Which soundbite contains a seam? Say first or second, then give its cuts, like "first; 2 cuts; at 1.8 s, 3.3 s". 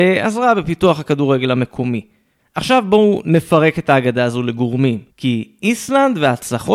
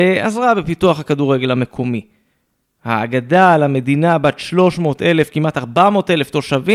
first; 2 cuts; at 2.4 s, 5.1 s